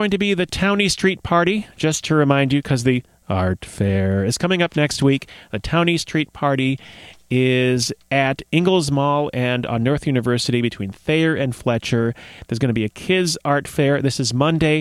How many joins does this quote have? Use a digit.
0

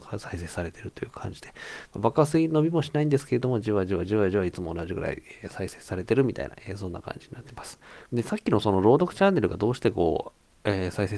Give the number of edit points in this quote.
1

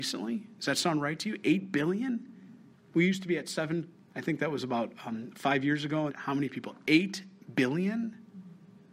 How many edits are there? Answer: 2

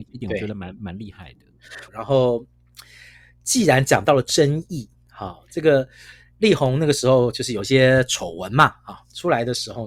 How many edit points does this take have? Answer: 1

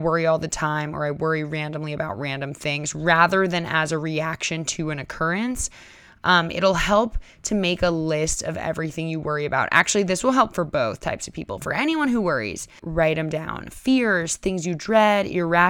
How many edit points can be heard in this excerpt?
1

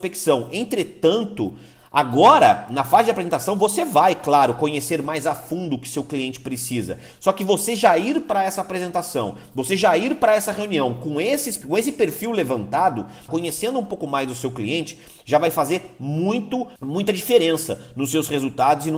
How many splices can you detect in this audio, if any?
3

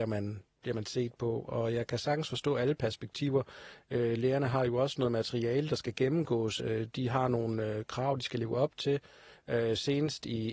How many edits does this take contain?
0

